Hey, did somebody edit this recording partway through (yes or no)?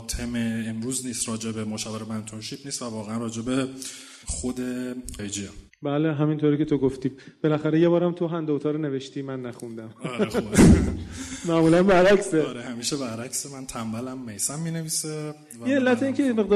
yes